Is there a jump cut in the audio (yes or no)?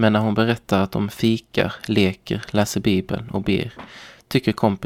no